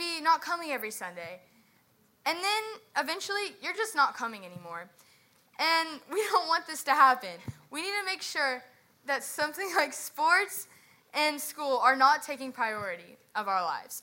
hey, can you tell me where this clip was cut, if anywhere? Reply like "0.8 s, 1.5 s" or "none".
none